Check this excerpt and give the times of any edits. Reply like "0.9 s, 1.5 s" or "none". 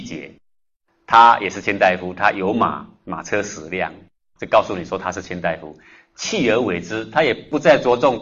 none

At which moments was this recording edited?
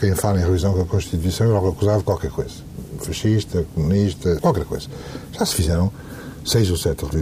4.4 s

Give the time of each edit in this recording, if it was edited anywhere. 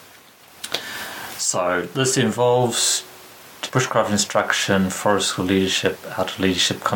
3.7 s

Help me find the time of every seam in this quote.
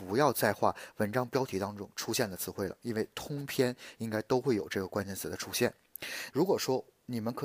6.3 s

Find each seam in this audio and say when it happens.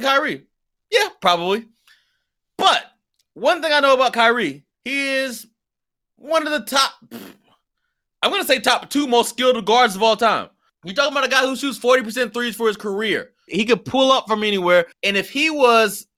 10.7 s, 13.5 s, 14.9 s

